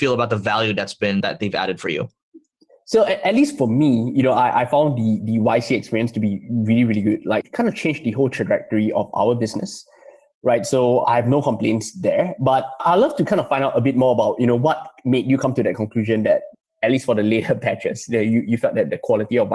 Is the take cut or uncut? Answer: uncut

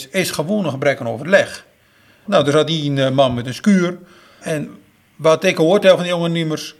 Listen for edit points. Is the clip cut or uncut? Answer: cut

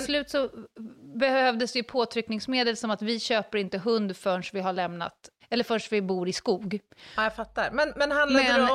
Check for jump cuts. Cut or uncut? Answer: cut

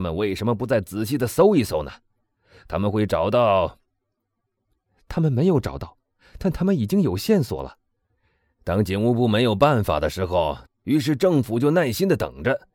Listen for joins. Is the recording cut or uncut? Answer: cut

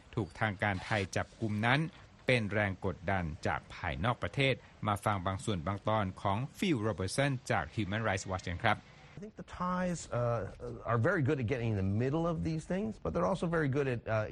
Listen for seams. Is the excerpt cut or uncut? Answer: cut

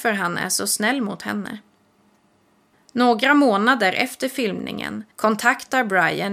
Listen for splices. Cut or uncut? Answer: cut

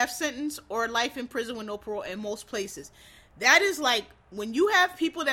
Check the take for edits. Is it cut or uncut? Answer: uncut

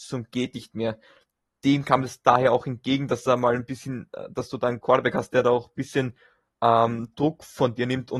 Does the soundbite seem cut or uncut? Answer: uncut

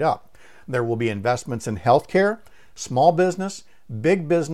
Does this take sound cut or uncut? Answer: uncut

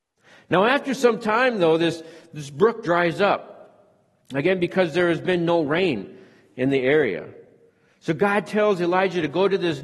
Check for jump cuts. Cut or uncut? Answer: uncut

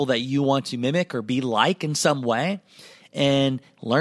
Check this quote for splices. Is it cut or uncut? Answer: uncut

